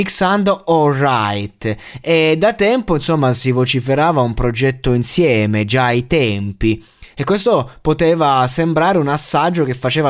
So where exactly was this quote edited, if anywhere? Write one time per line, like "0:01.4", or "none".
0:02.0